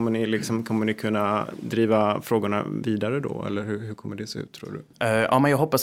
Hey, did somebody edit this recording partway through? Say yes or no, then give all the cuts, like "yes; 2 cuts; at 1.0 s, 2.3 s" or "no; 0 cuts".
yes; 1 cut; at 4.9 s